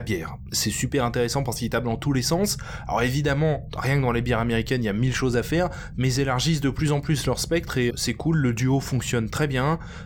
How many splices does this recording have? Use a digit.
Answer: 1